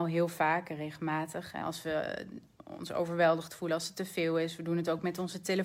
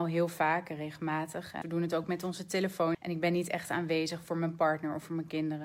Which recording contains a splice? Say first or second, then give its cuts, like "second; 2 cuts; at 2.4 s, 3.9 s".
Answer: second; 2 cuts; at 1.6 s, 2.9 s